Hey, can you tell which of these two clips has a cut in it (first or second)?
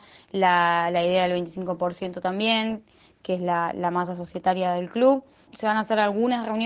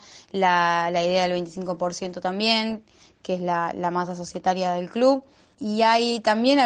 first